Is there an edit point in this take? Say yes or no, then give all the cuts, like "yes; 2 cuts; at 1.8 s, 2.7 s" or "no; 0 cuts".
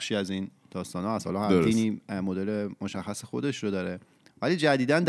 no; 0 cuts